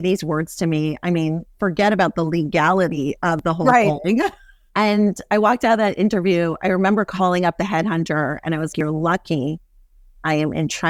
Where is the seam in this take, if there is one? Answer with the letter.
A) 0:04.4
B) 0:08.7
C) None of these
B